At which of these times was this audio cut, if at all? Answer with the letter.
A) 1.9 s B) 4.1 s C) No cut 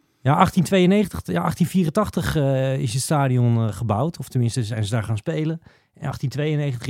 C